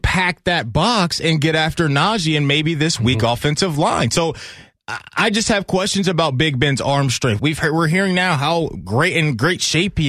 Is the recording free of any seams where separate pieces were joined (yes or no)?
no